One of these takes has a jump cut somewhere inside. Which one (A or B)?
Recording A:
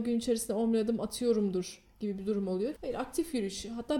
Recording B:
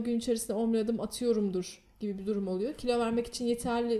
A